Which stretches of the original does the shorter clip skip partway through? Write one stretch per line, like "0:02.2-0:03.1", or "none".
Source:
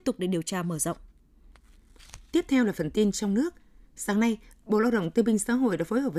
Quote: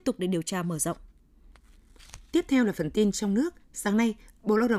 0:03.6-0:03.9